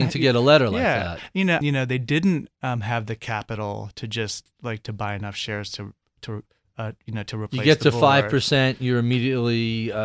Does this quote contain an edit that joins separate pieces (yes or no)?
yes